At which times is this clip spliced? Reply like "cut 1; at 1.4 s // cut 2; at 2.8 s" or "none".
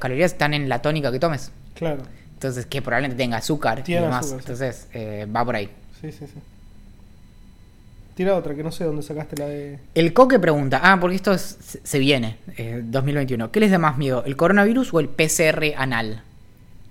cut 1; at 8.1 s